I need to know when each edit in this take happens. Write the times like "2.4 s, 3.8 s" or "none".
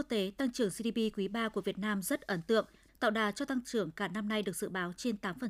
2.9 s